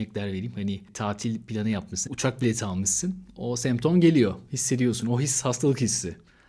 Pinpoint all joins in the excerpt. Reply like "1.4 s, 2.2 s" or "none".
2.1 s